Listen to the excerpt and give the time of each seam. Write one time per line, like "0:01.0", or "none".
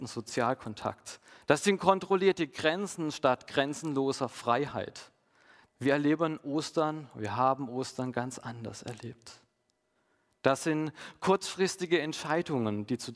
0:05.7